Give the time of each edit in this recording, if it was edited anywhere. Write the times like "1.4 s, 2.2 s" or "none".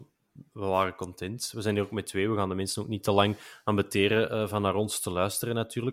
none